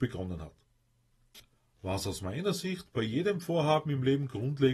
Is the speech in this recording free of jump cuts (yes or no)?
yes